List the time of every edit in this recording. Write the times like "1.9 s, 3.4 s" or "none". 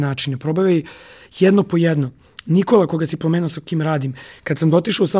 none

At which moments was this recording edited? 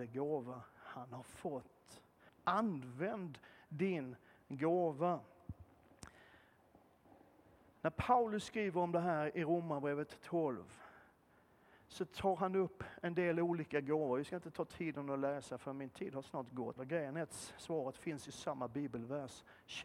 2.3 s, 16.8 s

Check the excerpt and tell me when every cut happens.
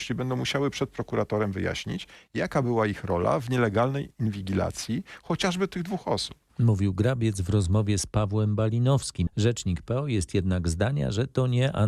9.3 s

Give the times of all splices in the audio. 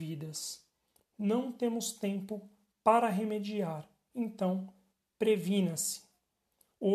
1.0 s

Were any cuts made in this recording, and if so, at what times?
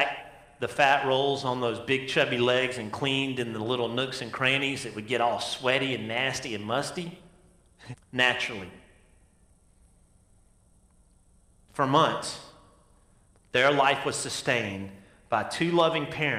7.9 s

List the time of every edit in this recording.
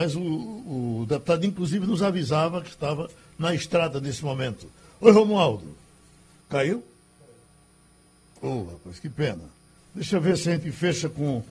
6.4 s, 9.8 s

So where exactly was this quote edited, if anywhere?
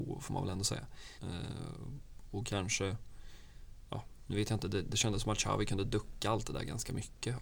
1.2 s

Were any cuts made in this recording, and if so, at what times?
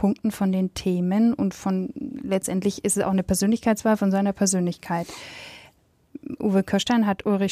none

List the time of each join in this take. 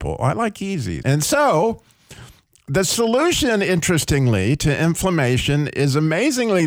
1.0 s

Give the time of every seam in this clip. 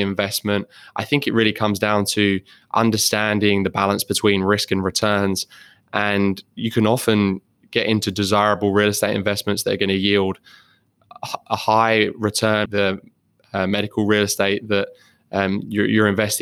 12.7 s

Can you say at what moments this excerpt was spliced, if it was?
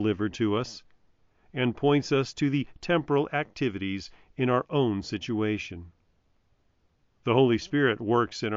none

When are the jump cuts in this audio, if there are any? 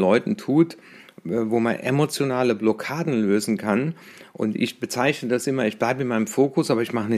none

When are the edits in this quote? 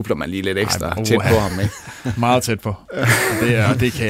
none

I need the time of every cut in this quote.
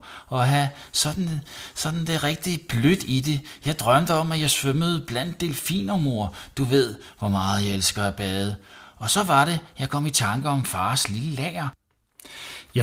none

